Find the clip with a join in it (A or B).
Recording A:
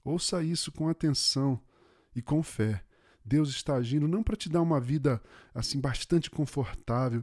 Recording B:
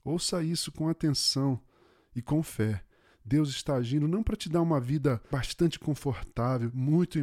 B